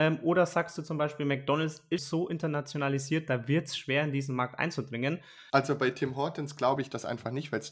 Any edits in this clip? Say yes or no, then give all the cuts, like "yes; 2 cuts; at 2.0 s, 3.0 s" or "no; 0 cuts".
yes; 2 cuts; at 2.0 s, 5.5 s